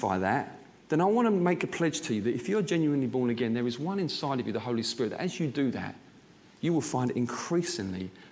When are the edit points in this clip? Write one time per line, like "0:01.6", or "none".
none